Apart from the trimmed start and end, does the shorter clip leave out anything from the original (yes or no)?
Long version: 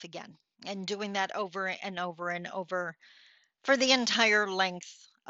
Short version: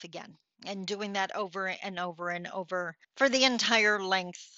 yes